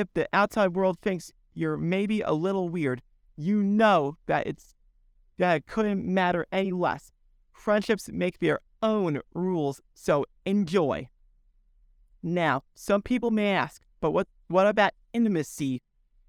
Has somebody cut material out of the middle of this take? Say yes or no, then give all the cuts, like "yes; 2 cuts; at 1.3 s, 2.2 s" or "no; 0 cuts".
no; 0 cuts